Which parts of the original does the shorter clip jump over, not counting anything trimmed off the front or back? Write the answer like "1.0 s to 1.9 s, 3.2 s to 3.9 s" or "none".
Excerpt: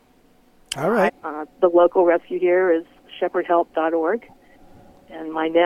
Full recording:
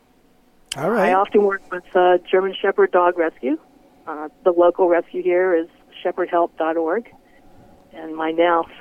1.1 s to 3.9 s